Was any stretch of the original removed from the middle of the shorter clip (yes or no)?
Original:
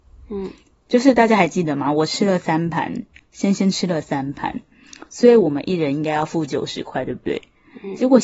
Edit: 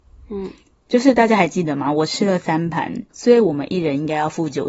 yes